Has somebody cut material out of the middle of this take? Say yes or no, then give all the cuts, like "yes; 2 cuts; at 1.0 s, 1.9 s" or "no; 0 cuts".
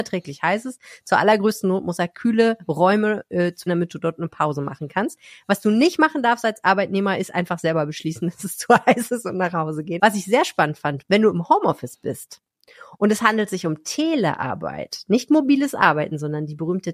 yes; 3 cuts; at 3.7 s, 10.0 s, 11.0 s